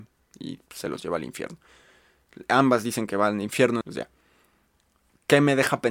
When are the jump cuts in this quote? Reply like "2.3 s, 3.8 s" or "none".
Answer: 3.8 s